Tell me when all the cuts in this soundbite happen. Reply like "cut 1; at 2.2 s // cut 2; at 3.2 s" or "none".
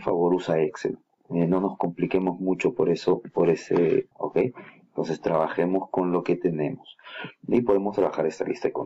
cut 1; at 1.2 s // cut 2; at 4.1 s